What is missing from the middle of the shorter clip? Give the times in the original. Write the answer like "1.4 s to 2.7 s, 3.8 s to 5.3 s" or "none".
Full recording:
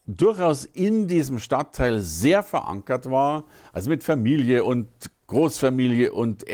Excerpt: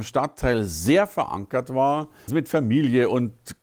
3.6 s to 3.8 s

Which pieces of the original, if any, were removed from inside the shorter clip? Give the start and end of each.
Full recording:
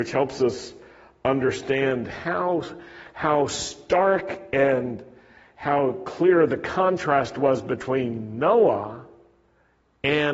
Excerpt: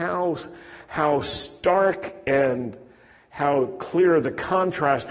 none

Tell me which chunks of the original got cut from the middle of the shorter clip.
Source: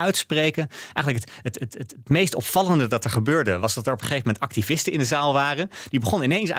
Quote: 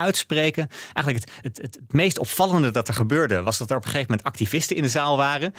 1.4 s to 1.6 s

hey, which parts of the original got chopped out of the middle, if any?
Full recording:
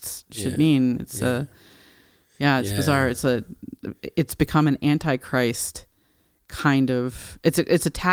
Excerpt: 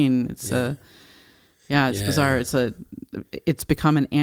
none

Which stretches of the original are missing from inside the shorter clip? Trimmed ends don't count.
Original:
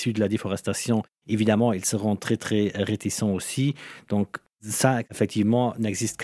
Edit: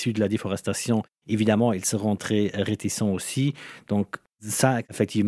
2.2 s to 2.4 s

